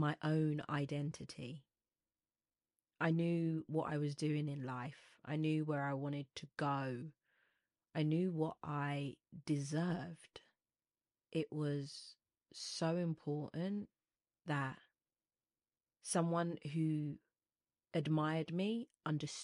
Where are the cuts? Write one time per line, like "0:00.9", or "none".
none